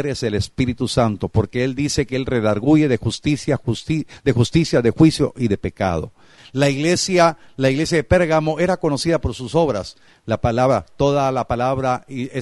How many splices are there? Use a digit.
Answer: 2